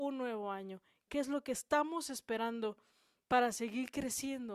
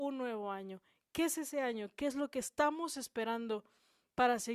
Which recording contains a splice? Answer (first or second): first